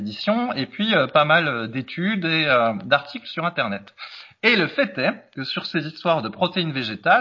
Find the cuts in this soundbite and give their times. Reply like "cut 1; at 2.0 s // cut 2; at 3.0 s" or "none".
none